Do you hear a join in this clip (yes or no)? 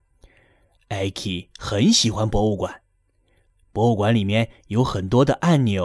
no